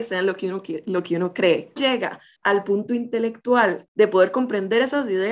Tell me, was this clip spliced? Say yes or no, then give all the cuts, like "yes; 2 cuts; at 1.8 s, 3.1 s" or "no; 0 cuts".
yes; 1 cut; at 1.8 s